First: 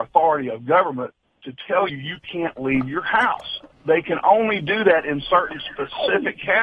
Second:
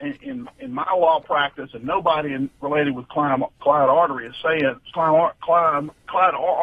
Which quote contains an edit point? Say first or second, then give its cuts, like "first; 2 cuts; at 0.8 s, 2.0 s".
first; 1 cut; at 1.9 s